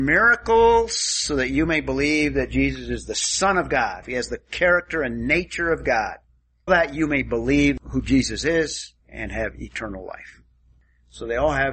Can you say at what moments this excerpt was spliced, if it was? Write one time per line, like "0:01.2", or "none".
0:04.0
0:06.7
0:09.0